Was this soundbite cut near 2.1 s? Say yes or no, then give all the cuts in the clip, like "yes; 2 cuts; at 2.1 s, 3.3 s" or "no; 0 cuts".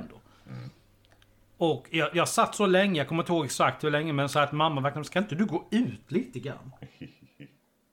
yes; 1 cut; at 2.1 s